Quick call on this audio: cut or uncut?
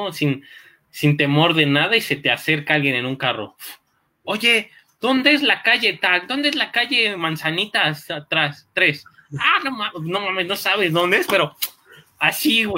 uncut